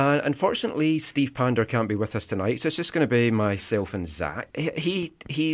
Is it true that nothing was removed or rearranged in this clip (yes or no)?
no